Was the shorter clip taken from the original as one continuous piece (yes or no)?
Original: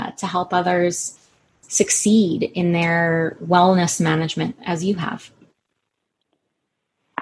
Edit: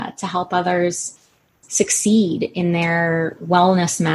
yes